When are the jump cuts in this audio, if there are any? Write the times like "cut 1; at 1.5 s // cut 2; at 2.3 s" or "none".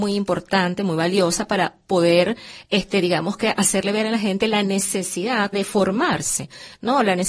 cut 1; at 5.5 s